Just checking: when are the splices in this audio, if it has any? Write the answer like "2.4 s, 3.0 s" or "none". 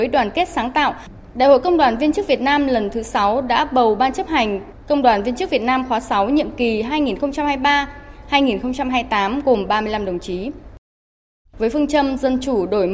11.5 s

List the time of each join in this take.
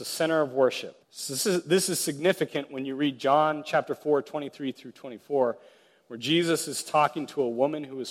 1.0 s

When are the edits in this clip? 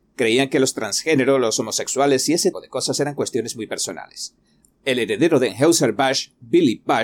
2.5 s, 4.6 s

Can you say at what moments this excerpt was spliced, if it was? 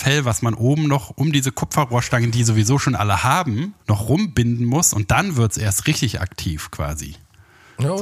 3.8 s

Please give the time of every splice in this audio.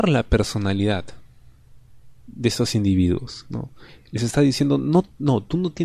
none

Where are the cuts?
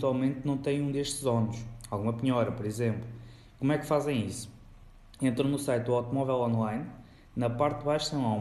none

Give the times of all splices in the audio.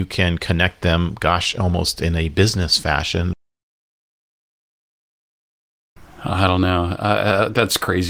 none

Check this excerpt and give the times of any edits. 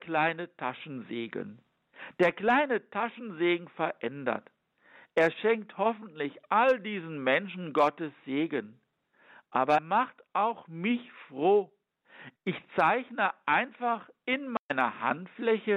9.8 s, 12.4 s

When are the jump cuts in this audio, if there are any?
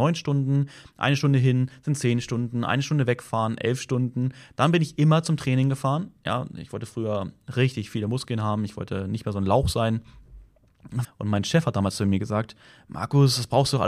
11.0 s

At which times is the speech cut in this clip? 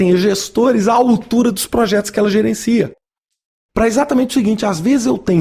3.7 s

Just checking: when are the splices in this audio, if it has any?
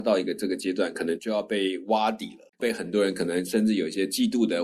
2.5 s

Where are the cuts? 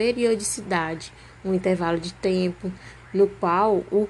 3.0 s

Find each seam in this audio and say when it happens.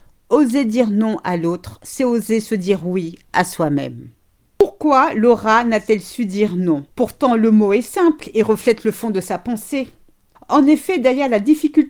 4.4 s, 6.9 s, 10.3 s

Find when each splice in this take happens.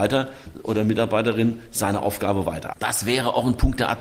2.7 s

